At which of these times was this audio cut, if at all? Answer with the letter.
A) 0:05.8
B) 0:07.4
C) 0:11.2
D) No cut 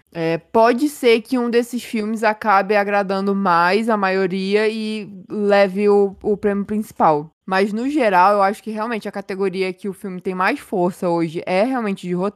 D